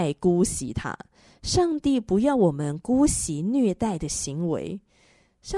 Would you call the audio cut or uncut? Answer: uncut